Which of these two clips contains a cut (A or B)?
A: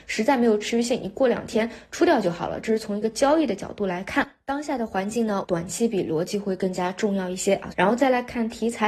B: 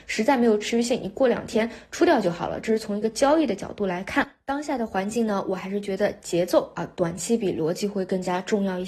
A